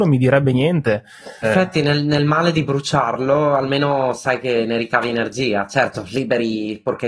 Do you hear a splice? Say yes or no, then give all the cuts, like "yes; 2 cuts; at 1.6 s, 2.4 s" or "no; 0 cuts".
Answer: yes; 1 cut; at 1.4 s